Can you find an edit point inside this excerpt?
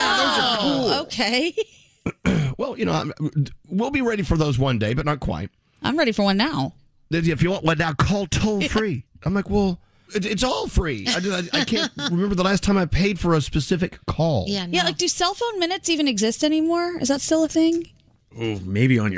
yes; 1 cut; at 10.1 s

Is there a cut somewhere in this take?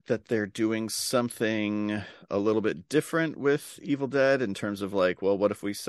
no; 0 cuts

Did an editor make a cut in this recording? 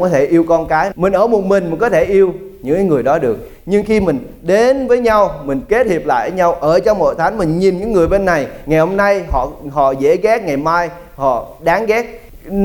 yes; 1 cut; at 0.9 s

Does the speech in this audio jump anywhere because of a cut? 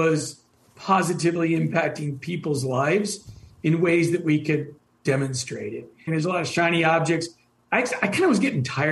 yes; 1 cut; at 6.1 s

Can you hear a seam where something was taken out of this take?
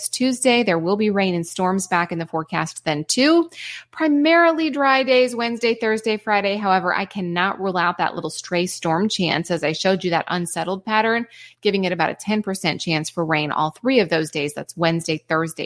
no; 0 cuts

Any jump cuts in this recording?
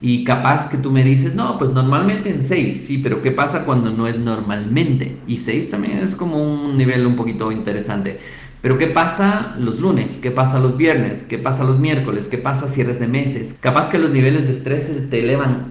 yes; 1 cut; at 13.5 s

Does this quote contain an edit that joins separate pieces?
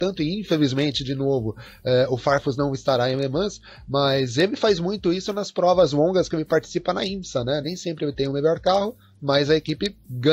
no; 0 cuts

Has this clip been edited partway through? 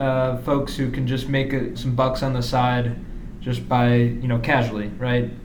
yes; 1 cut; at 1.7 s

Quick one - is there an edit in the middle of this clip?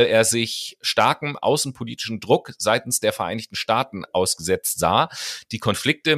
no; 0 cuts

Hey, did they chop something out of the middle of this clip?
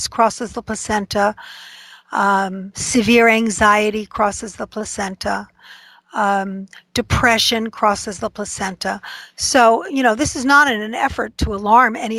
no; 0 cuts

